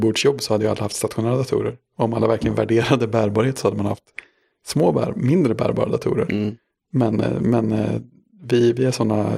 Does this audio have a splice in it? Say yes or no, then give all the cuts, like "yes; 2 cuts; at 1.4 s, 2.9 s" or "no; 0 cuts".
no; 0 cuts